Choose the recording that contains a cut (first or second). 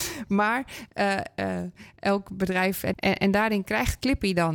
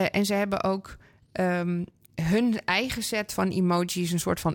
first